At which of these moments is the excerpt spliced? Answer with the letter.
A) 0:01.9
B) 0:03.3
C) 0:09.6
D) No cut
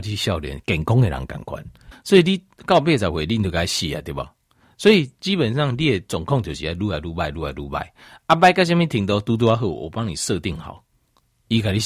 A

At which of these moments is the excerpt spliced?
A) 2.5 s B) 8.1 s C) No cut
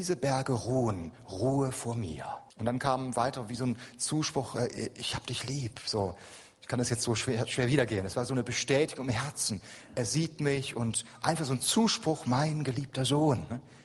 A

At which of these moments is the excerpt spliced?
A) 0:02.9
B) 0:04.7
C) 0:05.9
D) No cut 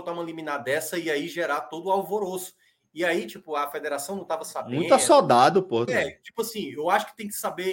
C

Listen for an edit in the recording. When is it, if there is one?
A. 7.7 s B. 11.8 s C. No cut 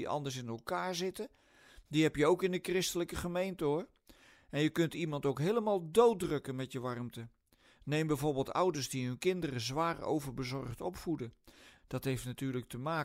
B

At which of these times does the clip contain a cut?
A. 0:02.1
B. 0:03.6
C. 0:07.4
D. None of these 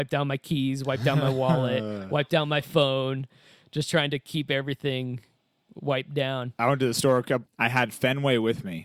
C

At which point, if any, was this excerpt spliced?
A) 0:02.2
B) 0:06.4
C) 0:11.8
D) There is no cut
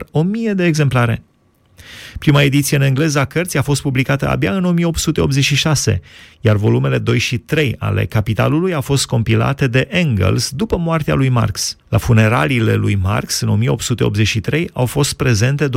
C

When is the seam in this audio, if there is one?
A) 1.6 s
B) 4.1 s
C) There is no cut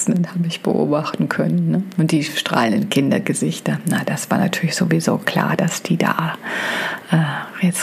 C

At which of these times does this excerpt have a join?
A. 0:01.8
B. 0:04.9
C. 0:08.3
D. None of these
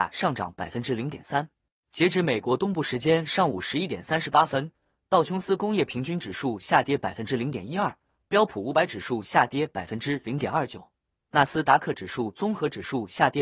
D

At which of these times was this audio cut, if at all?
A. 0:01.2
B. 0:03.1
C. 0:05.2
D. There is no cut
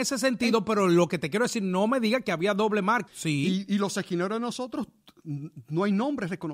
B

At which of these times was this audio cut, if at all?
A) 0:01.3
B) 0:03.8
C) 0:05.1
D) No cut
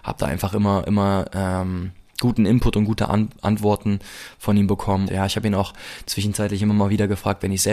C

